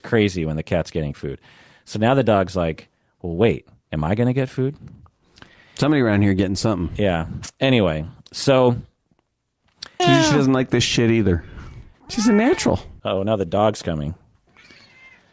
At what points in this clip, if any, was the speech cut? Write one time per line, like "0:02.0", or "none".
0:10.0
0:11.9
0:13.0